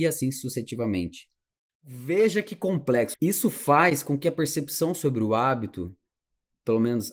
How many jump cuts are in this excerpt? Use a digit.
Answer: 1